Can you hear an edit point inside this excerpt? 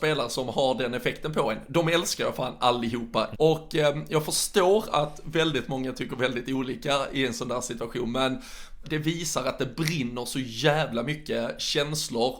yes; 2 cuts; at 3.3 s, 8.8 s

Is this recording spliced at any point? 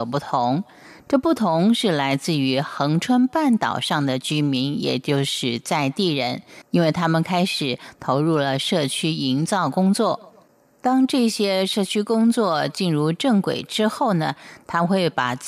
no; 0 cuts

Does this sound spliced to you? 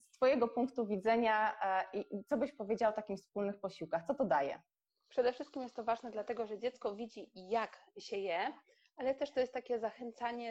no; 0 cuts

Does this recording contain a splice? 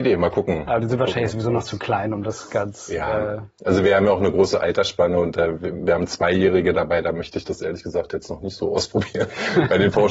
no; 0 cuts

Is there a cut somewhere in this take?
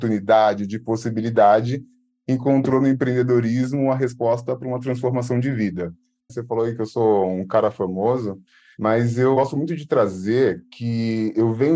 yes; 1 cut; at 6.3 s

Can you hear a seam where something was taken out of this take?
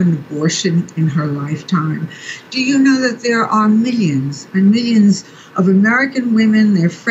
no; 0 cuts

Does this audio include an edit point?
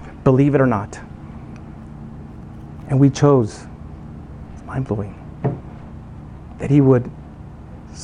yes; 1 cut; at 4.5 s

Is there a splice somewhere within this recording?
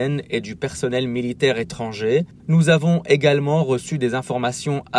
yes; 1 cut; at 2.3 s

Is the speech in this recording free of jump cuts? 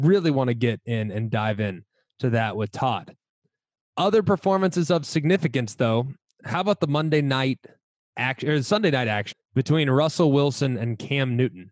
no; 1 cut; at 9.3 s

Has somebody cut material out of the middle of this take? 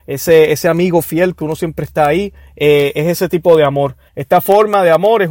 yes; 1 cut; at 4.1 s

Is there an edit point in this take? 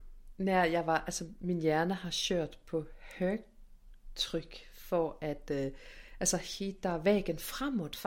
no; 0 cuts

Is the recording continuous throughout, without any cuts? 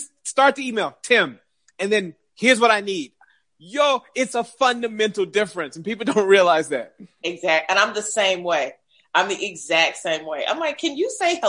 yes; 0 cuts

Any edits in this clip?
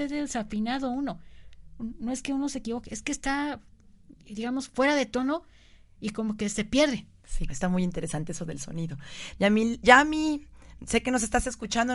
yes; 2 cuts; at 7.5 s, 9.3 s

